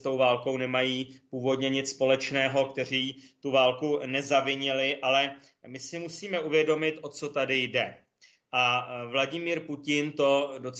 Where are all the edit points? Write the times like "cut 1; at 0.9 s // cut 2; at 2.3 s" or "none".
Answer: none